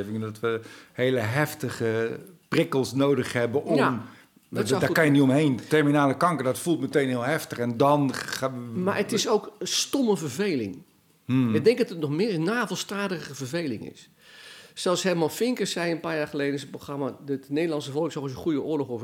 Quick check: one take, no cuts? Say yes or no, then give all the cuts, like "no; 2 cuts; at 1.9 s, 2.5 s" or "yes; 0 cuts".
yes; 0 cuts